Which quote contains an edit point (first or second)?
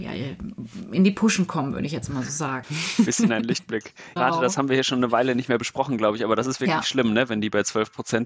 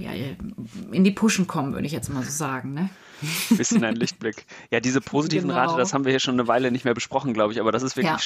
first